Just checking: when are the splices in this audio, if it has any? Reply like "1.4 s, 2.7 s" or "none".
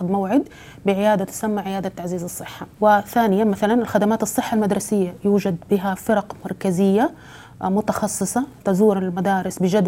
2.7 s